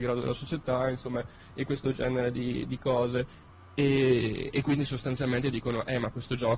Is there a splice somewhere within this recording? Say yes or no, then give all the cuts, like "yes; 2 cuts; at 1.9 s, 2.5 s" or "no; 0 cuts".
no; 0 cuts